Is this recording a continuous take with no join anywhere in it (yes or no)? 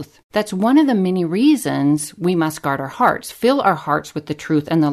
yes